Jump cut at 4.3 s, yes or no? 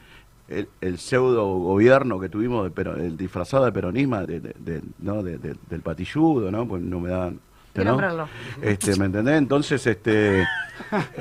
yes